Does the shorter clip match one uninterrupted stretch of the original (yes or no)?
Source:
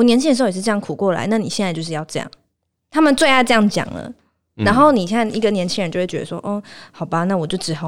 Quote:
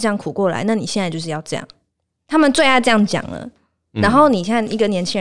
yes